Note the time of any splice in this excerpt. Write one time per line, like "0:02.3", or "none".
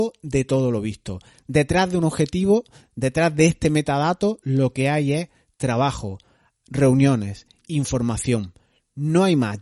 none

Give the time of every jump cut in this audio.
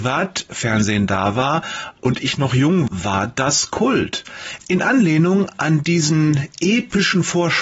0:02.9
0:04.6

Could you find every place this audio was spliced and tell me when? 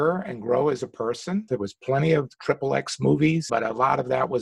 0:01.5
0:03.5

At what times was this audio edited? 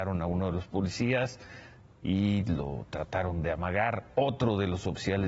none

